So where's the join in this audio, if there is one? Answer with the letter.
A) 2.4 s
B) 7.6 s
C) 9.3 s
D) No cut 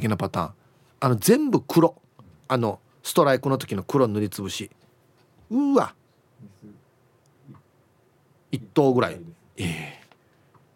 D